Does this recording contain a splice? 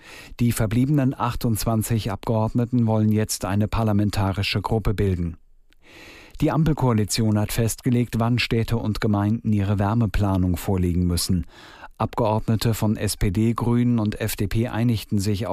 no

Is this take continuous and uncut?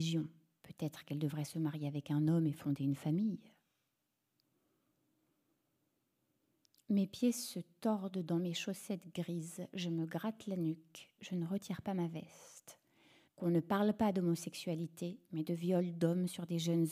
no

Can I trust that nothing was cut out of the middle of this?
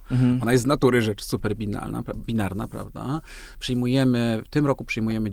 yes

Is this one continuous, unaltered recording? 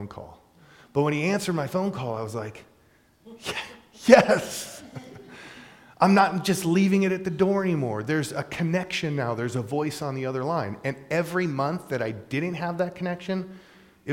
yes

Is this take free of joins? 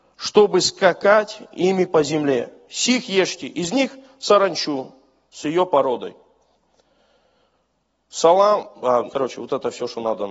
no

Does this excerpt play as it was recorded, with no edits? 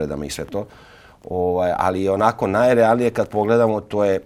yes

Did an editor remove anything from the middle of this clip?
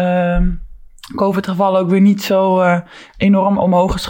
no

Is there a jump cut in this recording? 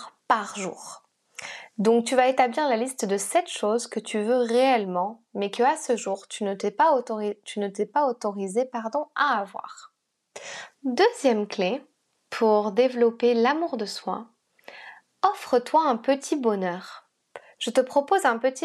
yes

